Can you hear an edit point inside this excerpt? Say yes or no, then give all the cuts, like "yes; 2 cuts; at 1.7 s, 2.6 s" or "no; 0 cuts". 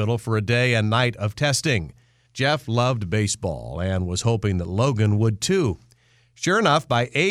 yes; 1 cut; at 2.3 s